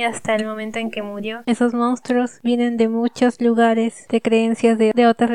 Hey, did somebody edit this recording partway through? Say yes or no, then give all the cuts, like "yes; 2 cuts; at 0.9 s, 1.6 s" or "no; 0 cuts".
yes; 1 cut; at 1.4 s